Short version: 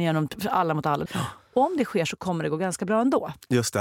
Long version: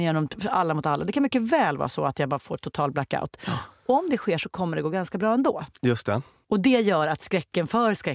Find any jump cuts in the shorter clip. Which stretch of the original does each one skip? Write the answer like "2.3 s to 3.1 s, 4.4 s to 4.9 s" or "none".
1.1 s to 3.4 s